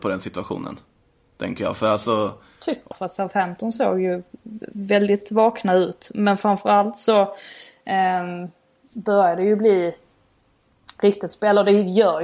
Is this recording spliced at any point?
yes; 1 cut; at 2.9 s

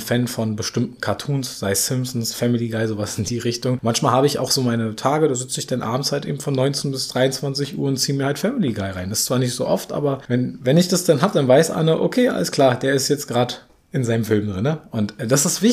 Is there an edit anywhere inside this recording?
no; 0 cuts

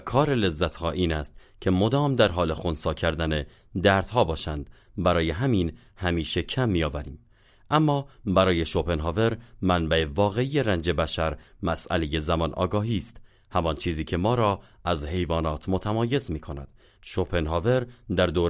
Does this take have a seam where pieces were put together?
yes; 1 cut; at 17.0 s

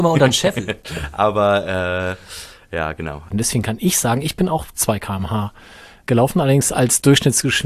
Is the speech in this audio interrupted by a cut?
yes; 2 cuts; at 3.3 s, 6.0 s

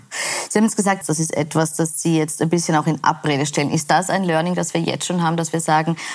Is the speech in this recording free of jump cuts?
no; 1 cut; at 1.0 s

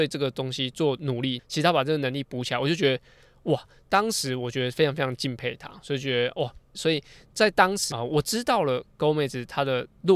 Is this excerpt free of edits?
no; 3 cuts; at 1.4 s, 6.7 s, 7.9 s

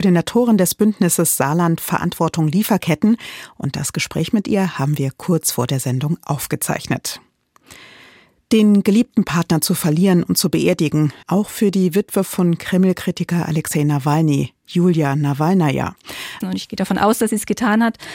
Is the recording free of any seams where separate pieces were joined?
no; 2 cuts; at 11.2 s, 16.4 s

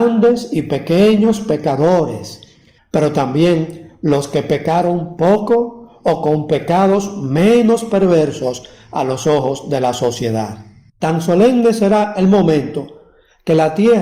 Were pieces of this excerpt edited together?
yes; 2 cuts; at 2.8 s, 10.9 s

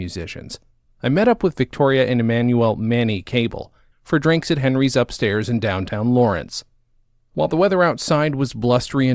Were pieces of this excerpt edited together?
yes; 1 cut; at 3.9 s

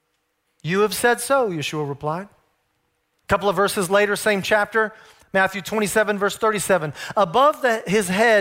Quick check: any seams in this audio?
yes; 1 cut; at 3.1 s

